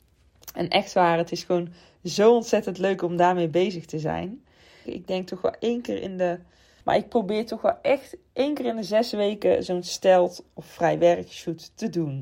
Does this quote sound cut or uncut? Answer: cut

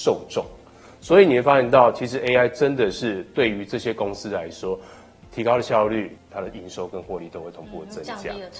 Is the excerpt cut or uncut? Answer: uncut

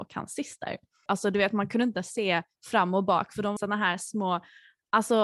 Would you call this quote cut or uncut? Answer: cut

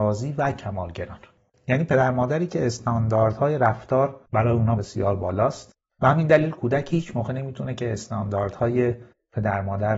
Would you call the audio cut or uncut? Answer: cut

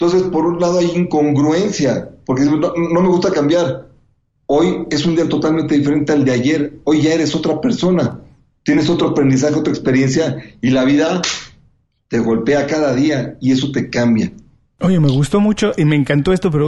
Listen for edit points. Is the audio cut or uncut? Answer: cut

